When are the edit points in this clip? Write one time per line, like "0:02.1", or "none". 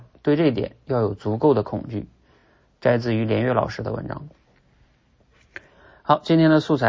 none